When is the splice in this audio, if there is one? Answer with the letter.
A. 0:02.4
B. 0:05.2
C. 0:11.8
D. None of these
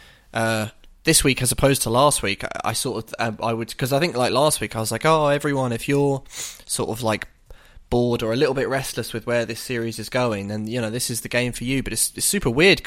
D